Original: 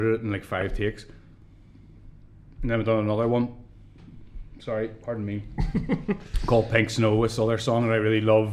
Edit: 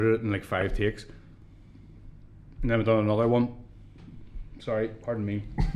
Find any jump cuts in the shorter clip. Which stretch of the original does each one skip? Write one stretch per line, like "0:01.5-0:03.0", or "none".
none